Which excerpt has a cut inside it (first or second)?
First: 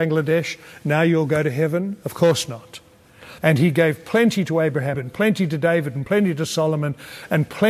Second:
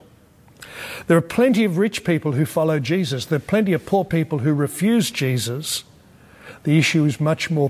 first